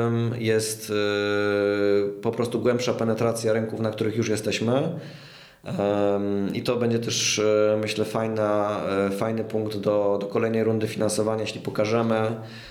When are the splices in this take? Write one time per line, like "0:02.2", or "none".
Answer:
none